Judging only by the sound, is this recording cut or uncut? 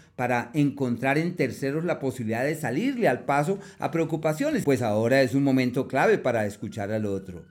cut